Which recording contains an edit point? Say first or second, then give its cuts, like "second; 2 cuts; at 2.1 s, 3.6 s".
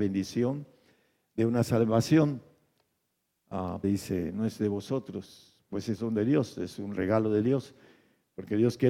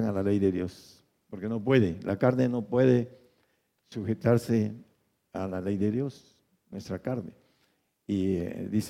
first; 1 cut; at 3.8 s